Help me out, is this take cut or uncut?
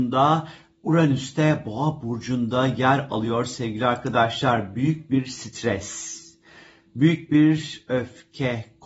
uncut